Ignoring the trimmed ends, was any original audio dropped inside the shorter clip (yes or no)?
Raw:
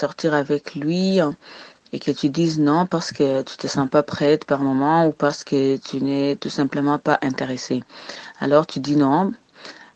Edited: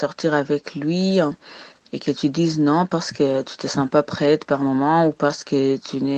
no